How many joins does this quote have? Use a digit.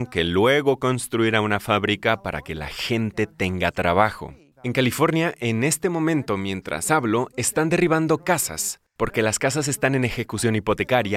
1